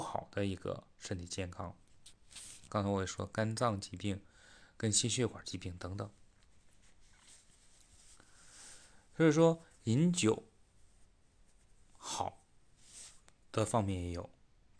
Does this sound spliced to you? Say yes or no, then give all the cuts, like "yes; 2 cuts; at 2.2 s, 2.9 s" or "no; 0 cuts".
yes; 1 cut; at 2.7 s